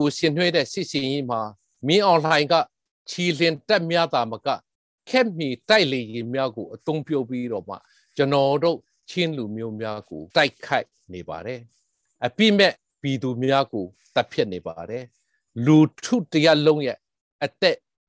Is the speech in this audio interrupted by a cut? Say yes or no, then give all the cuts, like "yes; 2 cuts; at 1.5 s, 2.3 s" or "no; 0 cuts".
yes; 1 cut; at 10.3 s